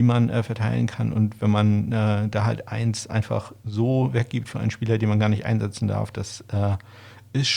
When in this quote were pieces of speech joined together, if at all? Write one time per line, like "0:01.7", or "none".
none